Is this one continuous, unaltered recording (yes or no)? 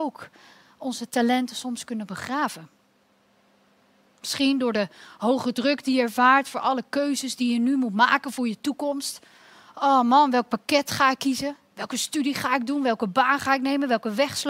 yes